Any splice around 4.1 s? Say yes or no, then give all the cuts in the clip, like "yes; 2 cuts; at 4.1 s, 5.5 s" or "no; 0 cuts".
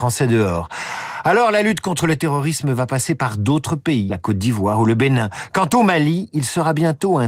yes; 1 cut; at 4.1 s